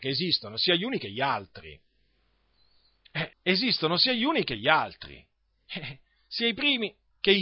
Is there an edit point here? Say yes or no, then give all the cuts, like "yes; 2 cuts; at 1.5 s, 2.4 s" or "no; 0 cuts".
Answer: yes; 1 cut; at 3.3 s